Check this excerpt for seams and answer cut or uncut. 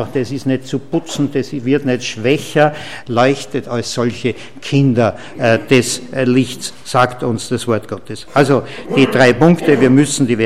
cut